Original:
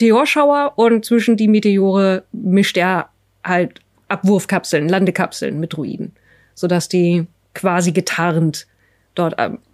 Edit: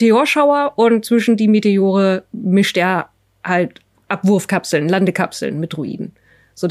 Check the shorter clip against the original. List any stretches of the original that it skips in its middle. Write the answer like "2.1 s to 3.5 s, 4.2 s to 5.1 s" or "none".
none